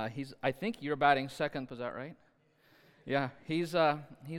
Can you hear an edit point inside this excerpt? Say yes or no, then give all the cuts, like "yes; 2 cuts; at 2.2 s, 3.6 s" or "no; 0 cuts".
yes; 1 cut; at 1.7 s